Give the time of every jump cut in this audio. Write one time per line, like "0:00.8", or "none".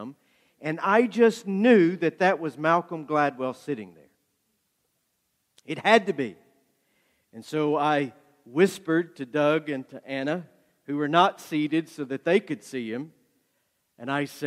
none